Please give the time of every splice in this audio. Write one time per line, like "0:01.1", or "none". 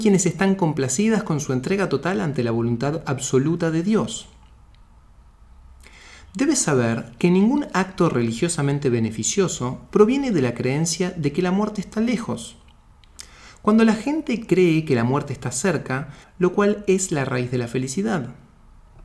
0:16.2